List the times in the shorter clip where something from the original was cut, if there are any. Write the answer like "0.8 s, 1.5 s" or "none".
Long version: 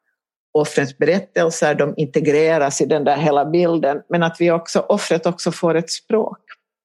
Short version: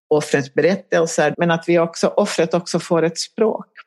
1.3 s